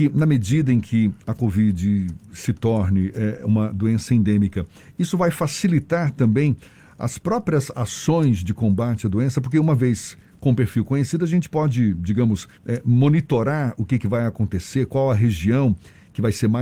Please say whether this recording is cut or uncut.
cut